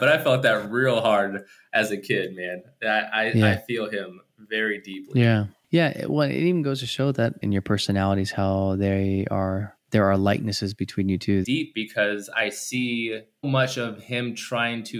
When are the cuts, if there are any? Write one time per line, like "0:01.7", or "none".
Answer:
0:07.4
0:11.4
0:13.4